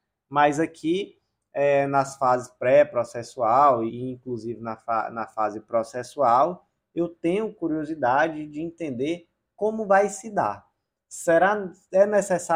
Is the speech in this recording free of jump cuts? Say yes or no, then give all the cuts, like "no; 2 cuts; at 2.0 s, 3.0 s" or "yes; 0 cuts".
no; 1 cut; at 3.9 s